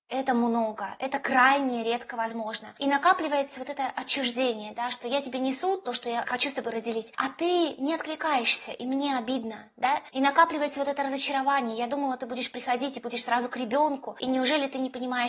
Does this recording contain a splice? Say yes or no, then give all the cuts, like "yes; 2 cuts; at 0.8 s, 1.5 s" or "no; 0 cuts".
no; 0 cuts